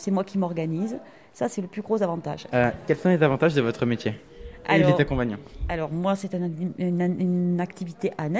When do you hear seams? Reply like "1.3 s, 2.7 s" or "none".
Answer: 2.5 s